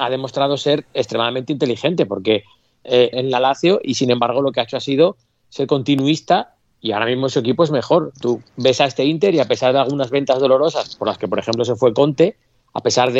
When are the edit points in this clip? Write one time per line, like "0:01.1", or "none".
0:03.1